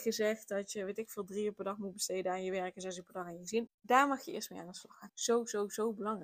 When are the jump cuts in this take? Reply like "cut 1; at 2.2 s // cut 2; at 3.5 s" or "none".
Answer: cut 1; at 3.7 s // cut 2; at 5.1 s

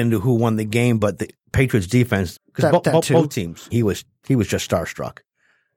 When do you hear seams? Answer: cut 1; at 2.3 s // cut 2; at 3.7 s

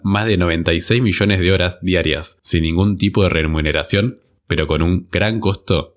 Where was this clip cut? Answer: none

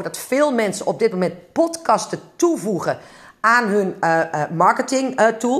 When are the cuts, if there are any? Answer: none

